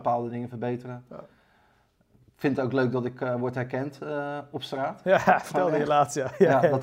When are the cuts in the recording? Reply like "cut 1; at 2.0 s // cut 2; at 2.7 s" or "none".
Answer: none